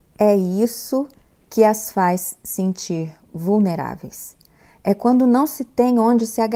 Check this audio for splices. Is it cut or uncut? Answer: uncut